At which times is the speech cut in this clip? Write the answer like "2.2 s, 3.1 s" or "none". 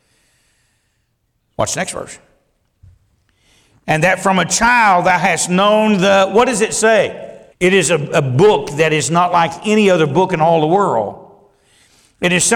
7.5 s